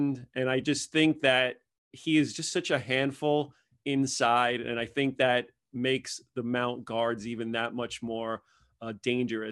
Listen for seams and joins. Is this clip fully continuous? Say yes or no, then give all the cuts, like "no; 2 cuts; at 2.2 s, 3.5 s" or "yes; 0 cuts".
yes; 0 cuts